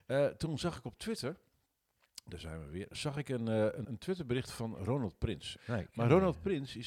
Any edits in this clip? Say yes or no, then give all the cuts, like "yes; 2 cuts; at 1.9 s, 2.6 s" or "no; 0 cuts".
yes; 2 cuts; at 3.8 s, 5.6 s